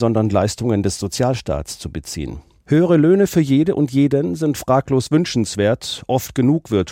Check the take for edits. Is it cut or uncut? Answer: cut